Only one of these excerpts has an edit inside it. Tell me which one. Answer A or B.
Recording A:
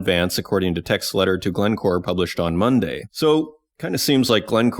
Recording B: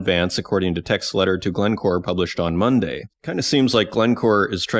B